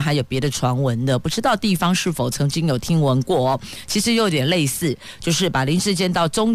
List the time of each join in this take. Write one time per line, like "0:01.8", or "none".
none